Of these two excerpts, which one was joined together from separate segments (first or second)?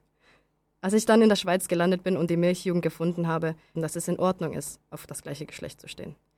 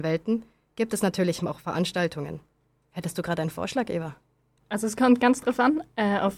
first